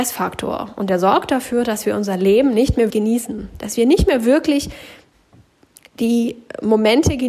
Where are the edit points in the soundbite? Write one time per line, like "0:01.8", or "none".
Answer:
0:02.9